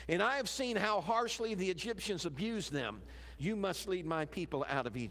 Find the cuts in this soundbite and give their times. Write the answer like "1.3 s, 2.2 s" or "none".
3.4 s